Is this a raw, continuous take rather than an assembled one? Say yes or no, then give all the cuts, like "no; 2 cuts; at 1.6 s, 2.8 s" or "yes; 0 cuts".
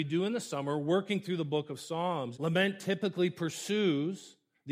no; 1 cut; at 2.3 s